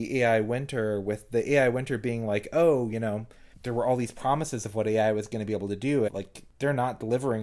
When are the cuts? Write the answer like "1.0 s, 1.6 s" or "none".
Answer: 6.1 s